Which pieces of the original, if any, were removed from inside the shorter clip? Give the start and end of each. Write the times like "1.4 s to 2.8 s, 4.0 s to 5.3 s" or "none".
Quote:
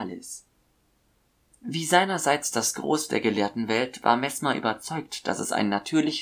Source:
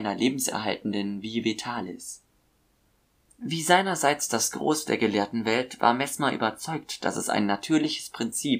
none